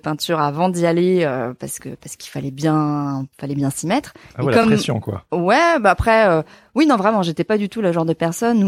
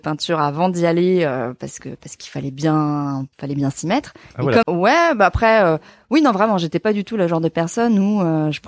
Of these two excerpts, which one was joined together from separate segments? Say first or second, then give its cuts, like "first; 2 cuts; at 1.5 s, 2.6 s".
second; 1 cut; at 4.6 s